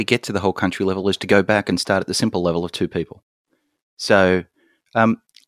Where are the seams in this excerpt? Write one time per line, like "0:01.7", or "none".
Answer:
none